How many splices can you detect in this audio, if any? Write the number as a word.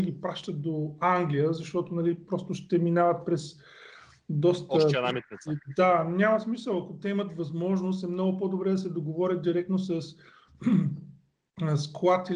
zero